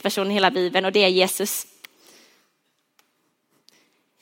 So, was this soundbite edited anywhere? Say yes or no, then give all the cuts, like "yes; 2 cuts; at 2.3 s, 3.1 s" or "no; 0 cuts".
no; 0 cuts